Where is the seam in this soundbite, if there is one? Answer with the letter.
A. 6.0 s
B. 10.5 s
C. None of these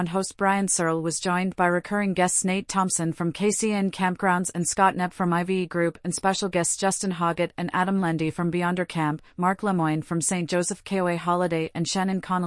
C